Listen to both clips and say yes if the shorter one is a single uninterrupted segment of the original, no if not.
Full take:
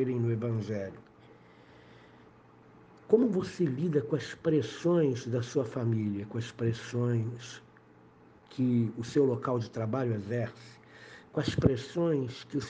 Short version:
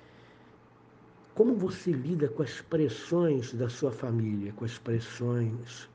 yes